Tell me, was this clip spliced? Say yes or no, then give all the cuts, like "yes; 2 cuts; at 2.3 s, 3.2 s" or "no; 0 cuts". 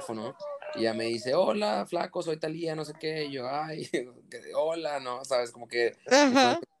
no; 0 cuts